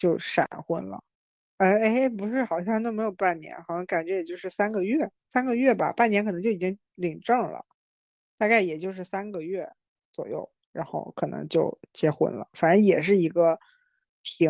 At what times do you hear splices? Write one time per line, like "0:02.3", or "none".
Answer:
none